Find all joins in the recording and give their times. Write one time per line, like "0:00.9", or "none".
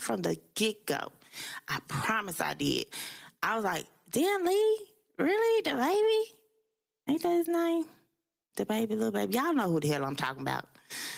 none